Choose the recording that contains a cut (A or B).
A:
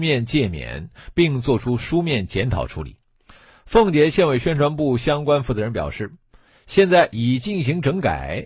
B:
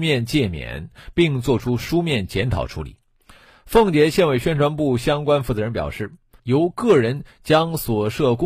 B